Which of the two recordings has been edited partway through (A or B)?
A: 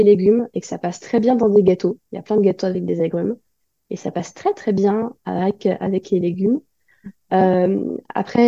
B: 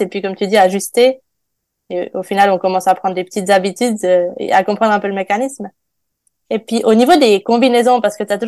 B